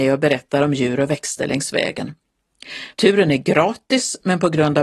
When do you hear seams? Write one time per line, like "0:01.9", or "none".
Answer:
0:02.9